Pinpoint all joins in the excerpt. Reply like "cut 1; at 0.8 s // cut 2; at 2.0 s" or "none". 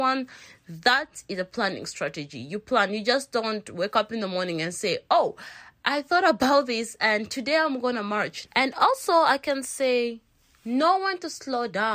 cut 1; at 8.4 s